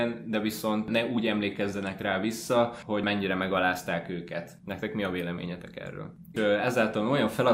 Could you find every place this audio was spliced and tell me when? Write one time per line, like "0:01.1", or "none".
0:06.3